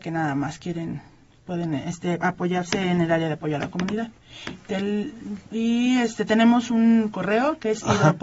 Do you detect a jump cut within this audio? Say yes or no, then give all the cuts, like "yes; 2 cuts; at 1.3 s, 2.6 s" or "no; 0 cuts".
no; 0 cuts